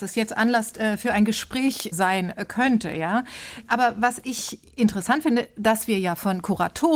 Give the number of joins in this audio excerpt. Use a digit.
0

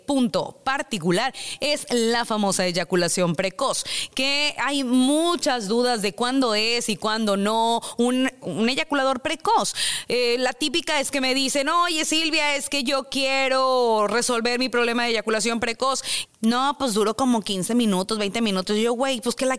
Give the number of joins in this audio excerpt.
2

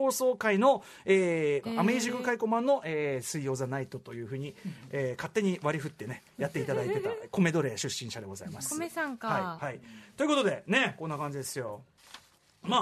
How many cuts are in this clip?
1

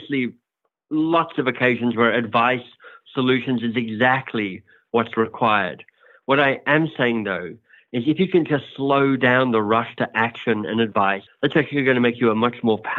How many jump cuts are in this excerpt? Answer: 1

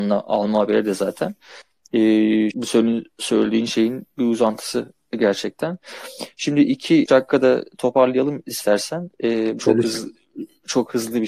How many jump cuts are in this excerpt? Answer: 3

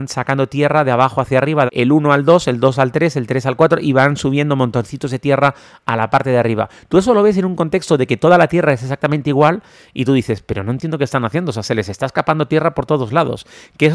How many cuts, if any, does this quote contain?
1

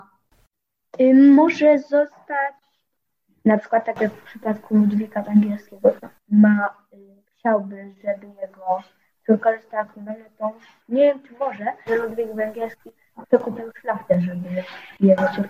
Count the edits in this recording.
1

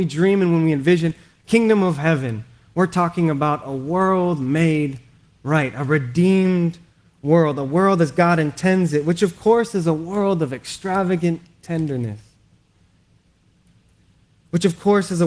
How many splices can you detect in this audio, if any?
0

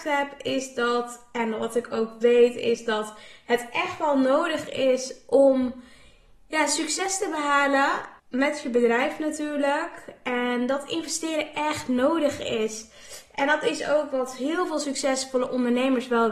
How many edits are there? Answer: 1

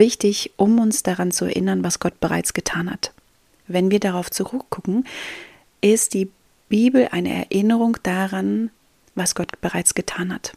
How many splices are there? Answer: 1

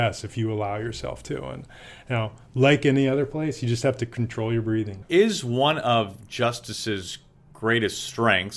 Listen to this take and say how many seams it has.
1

